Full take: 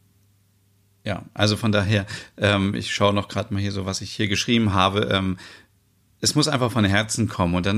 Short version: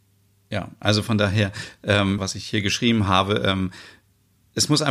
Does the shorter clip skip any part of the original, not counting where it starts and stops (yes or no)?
yes